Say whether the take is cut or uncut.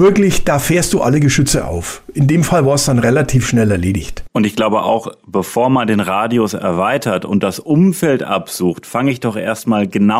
uncut